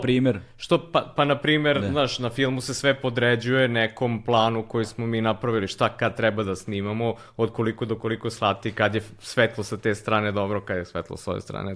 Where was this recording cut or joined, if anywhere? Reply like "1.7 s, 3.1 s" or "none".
none